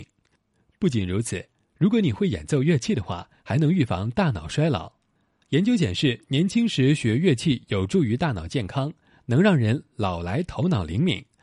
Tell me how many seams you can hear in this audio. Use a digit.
0